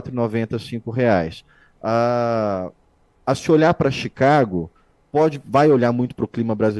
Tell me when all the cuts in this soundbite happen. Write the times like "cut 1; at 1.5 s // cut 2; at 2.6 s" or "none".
none